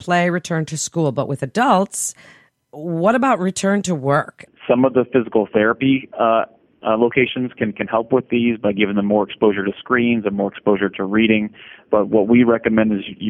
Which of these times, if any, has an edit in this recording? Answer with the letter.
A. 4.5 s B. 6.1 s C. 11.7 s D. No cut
A